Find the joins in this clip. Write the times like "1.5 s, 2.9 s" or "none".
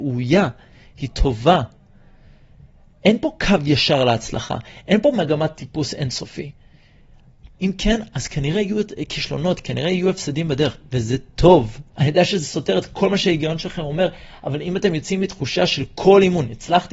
7.5 s, 11.9 s